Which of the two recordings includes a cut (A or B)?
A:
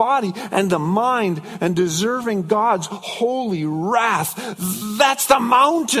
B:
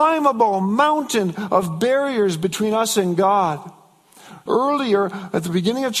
B